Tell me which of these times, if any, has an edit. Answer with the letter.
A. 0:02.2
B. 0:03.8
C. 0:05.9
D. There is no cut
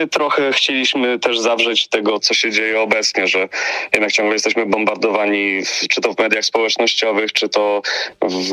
A